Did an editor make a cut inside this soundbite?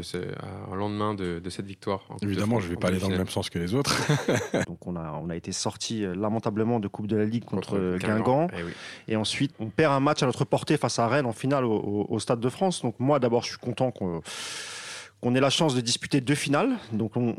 yes; 2 cuts; at 4.6 s, 9.5 s

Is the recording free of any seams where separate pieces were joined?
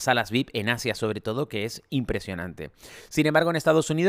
yes; 0 cuts

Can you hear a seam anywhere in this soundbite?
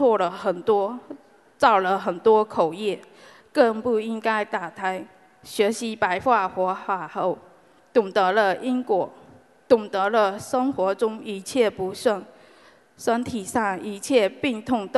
no; 0 cuts

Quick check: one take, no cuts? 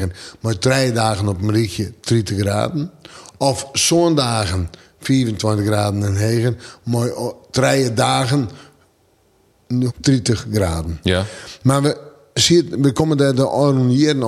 no; 1 cut; at 9.9 s

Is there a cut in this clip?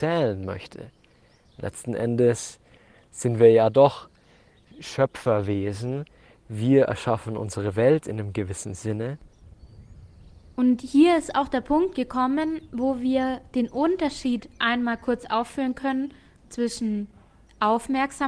no; 0 cuts

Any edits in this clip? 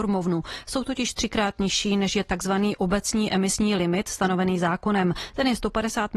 no; 0 cuts

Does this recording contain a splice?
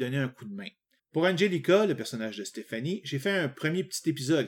yes; 1 cut; at 1.0 s

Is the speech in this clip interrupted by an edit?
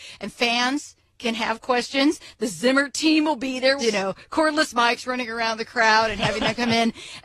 yes; 1 cut; at 3.8 s

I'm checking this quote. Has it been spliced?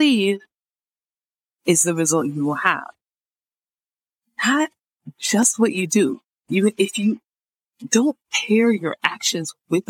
no; 0 cuts

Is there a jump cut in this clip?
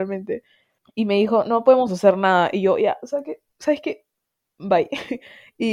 no; 0 cuts

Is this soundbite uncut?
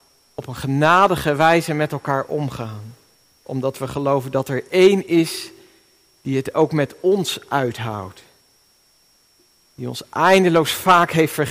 yes; 0 cuts

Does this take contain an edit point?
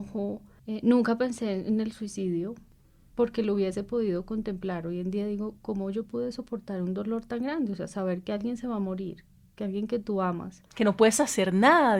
no; 0 cuts

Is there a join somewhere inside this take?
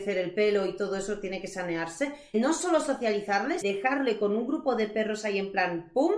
yes; 2 cuts; at 2.3 s, 3.6 s

